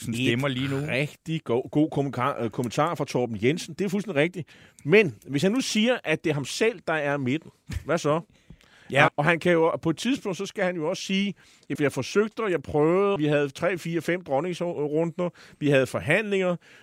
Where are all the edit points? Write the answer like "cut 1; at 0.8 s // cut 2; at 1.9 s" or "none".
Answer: cut 1; at 9.1 s // cut 2; at 11.8 s // cut 3; at 13.2 s

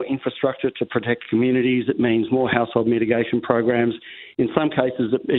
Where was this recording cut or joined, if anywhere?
none

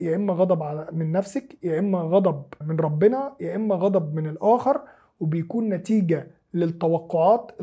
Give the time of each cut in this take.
cut 1; at 2.6 s

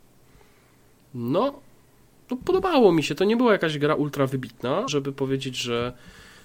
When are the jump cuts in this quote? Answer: cut 1; at 4.9 s

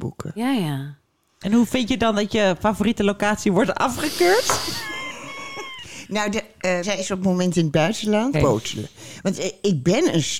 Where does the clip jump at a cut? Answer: cut 1; at 6.8 s // cut 2; at 8.3 s

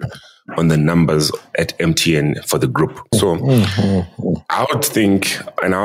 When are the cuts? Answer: none

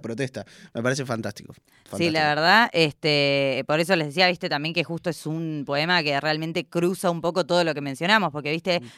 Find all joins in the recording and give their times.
none

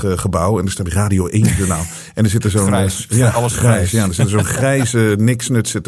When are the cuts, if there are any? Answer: none

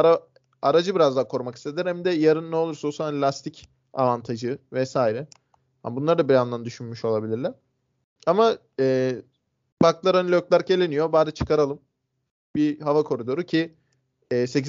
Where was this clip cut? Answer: none

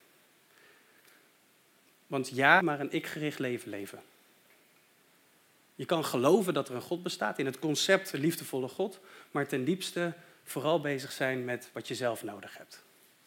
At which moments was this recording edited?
cut 1; at 2.6 s

